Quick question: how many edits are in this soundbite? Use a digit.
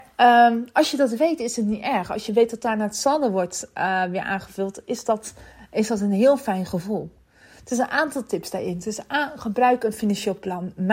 0